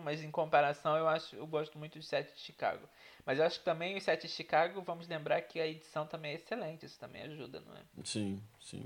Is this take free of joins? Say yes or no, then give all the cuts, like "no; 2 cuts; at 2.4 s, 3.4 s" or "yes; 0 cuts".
yes; 0 cuts